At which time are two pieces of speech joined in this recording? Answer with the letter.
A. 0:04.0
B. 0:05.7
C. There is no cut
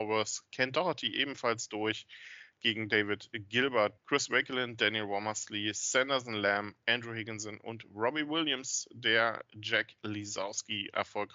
A